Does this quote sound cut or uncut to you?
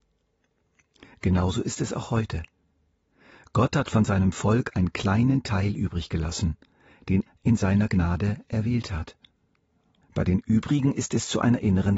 cut